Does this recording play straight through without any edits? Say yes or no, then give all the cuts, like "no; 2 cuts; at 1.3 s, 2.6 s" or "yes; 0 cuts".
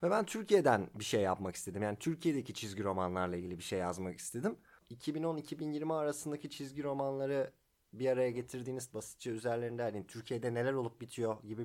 no; 2 cuts; at 4.8 s, 8.9 s